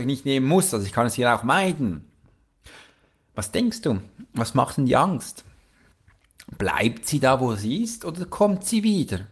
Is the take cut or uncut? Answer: uncut